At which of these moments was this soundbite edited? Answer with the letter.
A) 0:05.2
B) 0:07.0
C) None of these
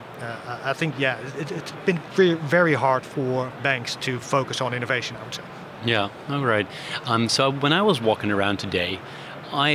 C